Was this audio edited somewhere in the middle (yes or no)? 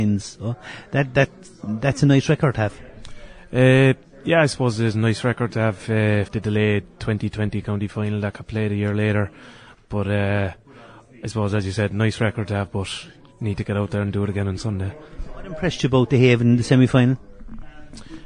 yes